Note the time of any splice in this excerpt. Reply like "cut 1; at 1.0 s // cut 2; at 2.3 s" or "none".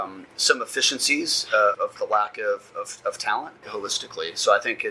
cut 1; at 1.7 s // cut 2; at 3.6 s